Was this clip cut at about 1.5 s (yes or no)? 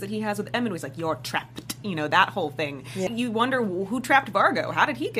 no